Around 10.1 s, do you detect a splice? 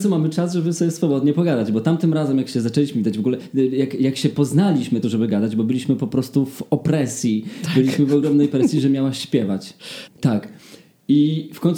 yes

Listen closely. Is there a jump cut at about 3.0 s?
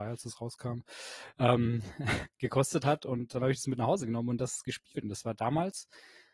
no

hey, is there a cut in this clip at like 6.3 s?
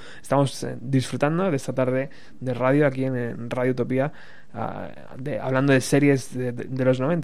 no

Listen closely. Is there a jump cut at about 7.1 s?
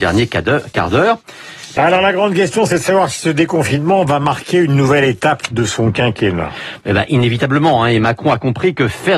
no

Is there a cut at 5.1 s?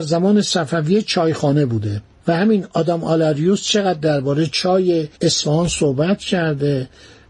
yes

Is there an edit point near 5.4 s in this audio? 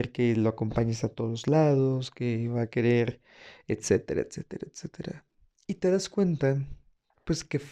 no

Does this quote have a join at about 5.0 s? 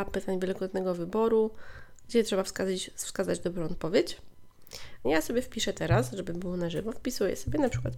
yes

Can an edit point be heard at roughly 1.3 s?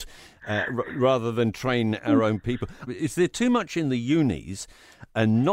no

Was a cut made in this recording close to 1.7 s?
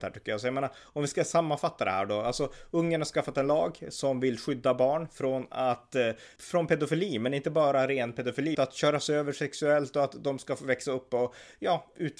no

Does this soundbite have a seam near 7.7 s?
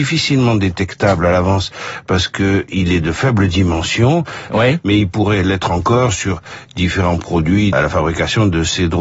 yes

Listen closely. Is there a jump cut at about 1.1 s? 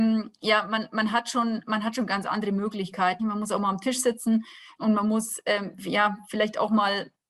no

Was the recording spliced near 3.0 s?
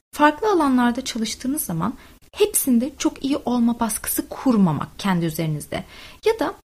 yes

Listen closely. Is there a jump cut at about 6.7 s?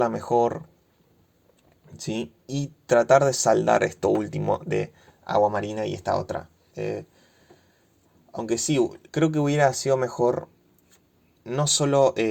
yes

